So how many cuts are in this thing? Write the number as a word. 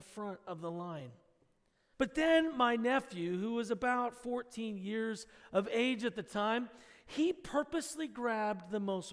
one